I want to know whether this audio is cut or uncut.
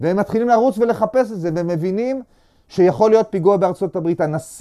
uncut